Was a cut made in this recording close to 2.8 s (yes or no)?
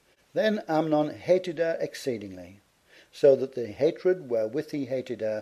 no